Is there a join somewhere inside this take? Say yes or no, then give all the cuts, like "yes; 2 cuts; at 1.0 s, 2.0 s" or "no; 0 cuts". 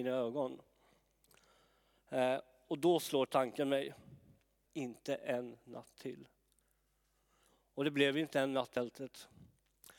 yes; 1 cut; at 4.7 s